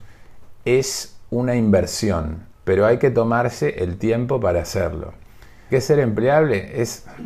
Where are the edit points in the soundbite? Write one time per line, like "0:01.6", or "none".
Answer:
0:02.5
0:05.7